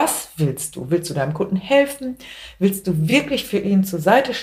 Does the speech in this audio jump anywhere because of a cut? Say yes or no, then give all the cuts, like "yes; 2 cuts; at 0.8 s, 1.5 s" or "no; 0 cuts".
no; 0 cuts